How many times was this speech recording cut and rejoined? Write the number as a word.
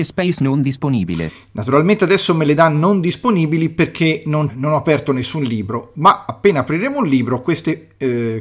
one